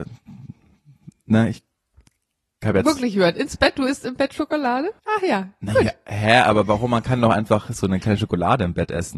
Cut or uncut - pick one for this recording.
cut